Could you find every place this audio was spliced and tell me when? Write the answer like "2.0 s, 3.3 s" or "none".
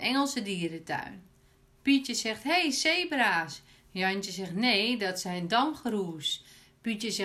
none